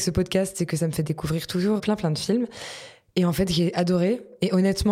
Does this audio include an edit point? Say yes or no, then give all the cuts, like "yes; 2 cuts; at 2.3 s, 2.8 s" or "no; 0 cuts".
yes; 1 cut; at 1.8 s